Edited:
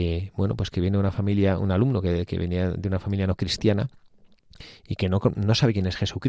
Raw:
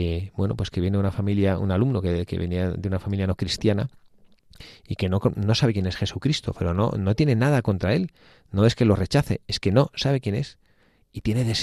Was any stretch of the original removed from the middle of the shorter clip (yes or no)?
no